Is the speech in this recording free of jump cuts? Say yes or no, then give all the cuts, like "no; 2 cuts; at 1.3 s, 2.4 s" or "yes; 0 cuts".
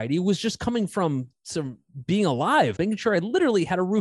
no; 1 cut; at 2.8 s